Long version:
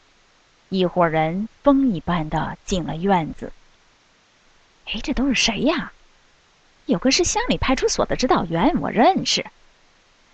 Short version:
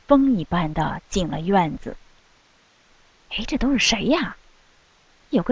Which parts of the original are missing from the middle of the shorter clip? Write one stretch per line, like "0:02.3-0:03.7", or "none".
none

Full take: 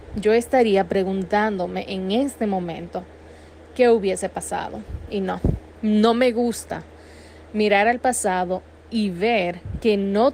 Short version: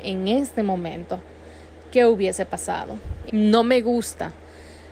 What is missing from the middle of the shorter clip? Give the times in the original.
0:05.1-0:05.8

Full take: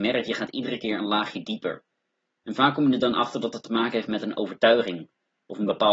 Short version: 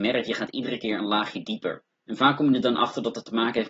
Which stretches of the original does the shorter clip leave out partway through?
0:01.9-0:02.3

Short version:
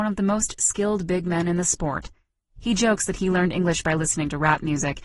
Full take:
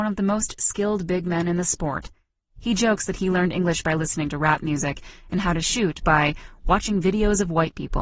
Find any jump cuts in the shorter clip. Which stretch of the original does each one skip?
none

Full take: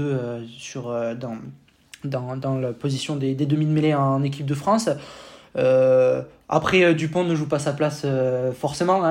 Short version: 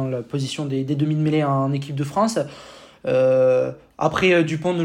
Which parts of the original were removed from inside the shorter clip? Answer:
none

